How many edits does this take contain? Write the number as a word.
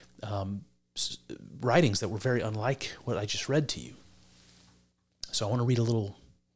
zero